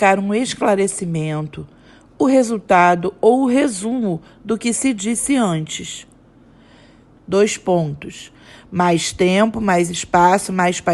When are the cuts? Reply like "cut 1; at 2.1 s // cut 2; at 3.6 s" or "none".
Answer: cut 1; at 7.2 s